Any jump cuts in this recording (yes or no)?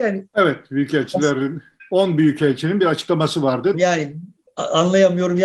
yes